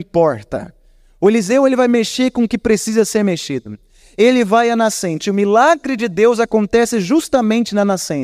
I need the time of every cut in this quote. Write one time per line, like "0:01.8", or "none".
none